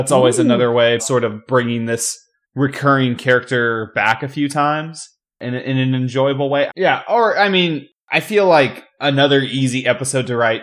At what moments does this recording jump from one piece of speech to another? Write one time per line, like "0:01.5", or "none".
0:01.0
0:06.7